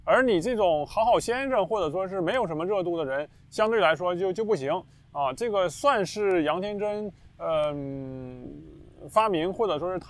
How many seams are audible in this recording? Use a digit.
0